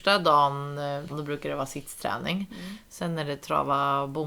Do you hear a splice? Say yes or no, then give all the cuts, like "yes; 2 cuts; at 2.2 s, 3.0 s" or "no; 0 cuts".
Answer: yes; 1 cut; at 1.1 s